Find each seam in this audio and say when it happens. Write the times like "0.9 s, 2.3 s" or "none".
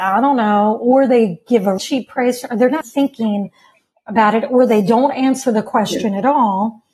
1.8 s, 2.8 s

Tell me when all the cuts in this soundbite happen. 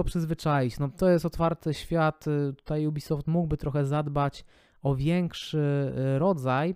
none

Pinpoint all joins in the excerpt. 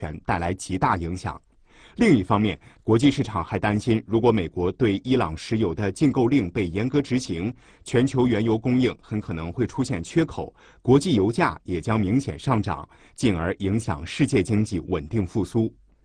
none

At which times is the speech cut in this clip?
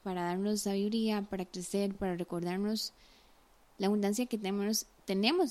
none

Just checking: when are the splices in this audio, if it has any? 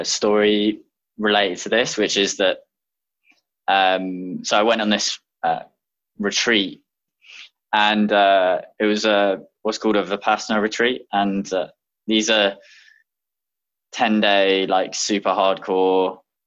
7.1 s

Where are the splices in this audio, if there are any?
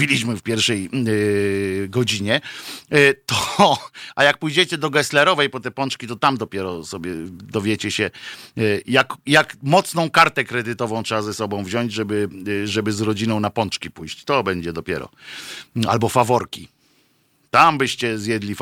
none

